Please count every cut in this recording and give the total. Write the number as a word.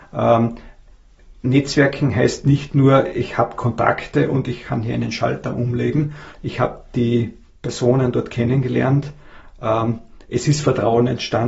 one